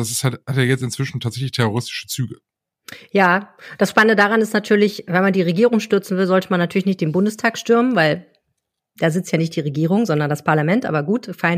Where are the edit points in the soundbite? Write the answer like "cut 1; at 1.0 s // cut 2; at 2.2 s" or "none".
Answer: none